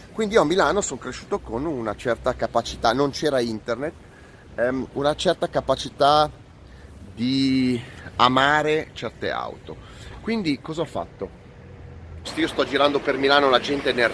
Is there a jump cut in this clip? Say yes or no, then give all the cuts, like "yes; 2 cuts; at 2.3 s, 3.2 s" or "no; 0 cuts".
yes; 1 cut; at 12.2 s